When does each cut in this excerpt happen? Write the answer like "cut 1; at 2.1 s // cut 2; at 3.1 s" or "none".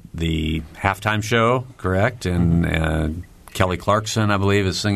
none